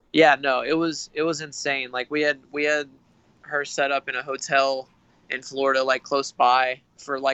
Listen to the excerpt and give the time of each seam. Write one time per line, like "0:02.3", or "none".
none

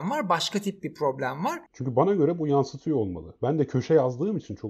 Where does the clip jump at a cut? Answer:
0:01.7

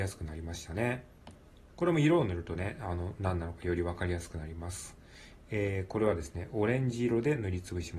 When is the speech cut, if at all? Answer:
0:01.7

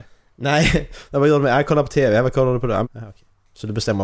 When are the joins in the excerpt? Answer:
0:02.8

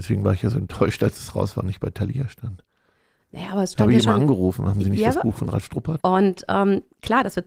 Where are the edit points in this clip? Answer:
0:06.0

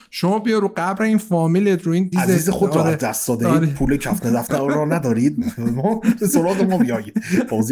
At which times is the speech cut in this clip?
0:02.1

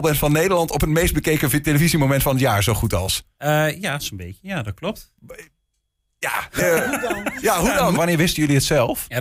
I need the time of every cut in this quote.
0:06.6
0:08.0

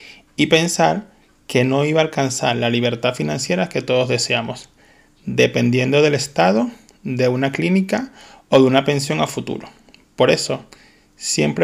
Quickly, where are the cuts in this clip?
none

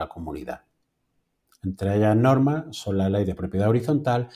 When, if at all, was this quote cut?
0:01.5

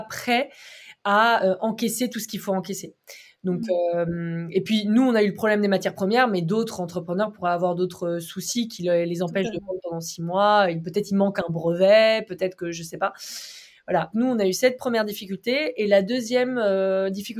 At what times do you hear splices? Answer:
0:14.1

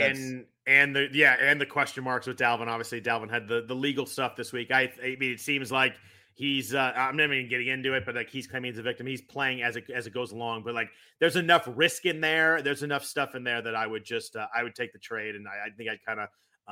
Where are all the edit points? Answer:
none

